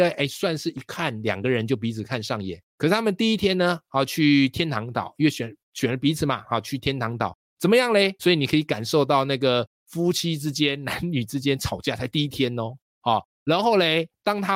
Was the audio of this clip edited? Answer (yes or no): yes